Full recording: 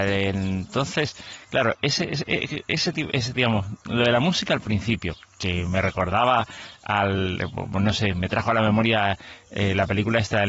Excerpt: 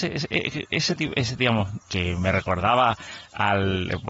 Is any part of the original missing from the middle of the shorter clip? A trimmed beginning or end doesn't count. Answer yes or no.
yes